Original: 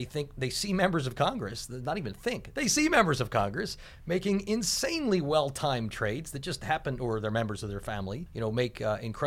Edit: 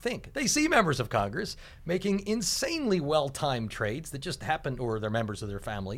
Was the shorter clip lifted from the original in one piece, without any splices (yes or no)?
yes